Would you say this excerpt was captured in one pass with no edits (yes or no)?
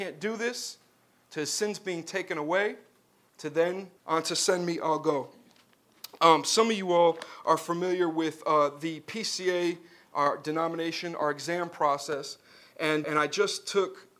no